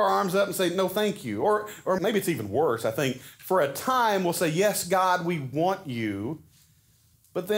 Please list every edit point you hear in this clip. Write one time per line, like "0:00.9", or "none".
0:02.0